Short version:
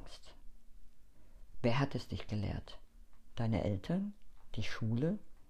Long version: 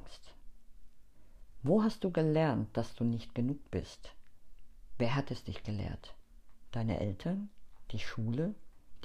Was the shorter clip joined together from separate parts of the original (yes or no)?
yes